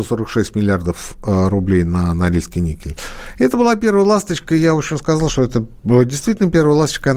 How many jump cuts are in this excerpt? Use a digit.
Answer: 0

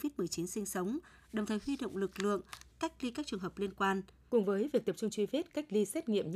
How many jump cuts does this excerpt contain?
2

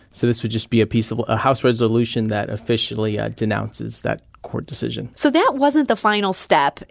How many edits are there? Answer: 1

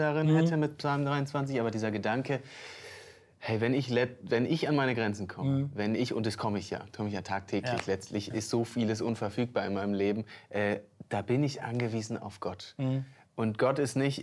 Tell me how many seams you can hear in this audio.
1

